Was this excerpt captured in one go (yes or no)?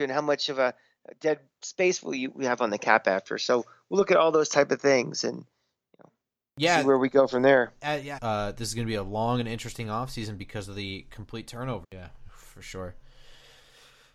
no